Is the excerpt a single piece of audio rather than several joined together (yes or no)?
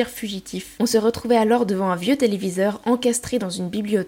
yes